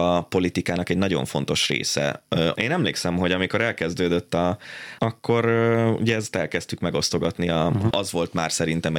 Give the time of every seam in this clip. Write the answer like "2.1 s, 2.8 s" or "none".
2.5 s, 5.0 s, 7.9 s